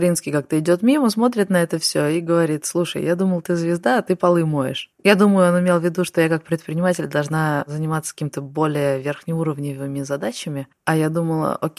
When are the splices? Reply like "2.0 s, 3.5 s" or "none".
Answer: none